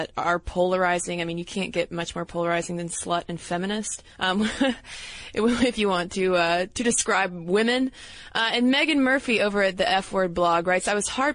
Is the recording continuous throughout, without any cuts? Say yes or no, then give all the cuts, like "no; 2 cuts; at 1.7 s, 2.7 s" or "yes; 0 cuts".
no; 1 cut; at 4.1 s